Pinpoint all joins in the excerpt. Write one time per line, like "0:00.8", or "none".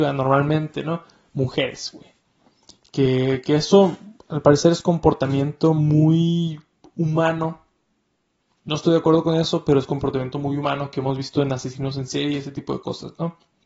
none